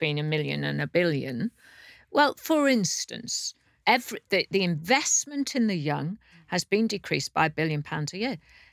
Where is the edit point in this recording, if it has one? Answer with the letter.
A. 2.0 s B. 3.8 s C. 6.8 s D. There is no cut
B